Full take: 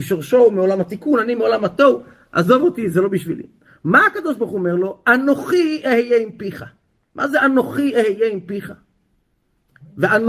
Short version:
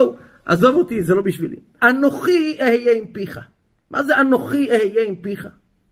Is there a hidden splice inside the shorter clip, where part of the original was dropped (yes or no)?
yes